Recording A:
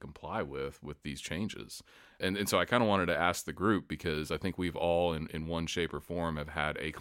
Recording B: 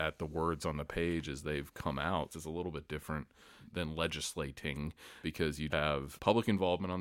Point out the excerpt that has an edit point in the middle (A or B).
B